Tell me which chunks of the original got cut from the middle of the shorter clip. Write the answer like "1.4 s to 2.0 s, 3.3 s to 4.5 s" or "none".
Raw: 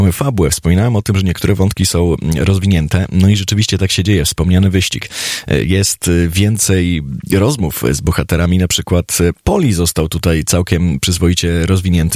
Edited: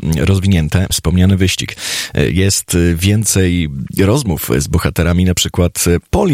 3.1 s to 4.2 s